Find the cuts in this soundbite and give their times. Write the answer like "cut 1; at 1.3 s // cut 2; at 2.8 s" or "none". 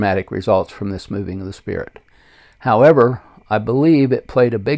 none